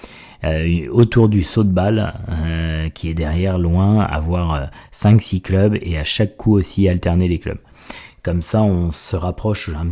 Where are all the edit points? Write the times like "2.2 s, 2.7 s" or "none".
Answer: none

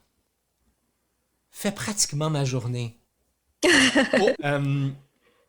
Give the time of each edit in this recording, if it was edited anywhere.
4.4 s

